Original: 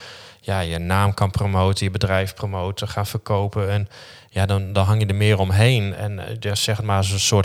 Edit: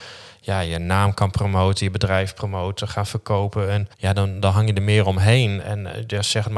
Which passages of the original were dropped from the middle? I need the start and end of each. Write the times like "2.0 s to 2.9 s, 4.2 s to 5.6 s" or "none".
3.9 s to 4.3 s